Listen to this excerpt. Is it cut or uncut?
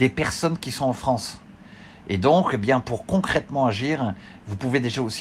uncut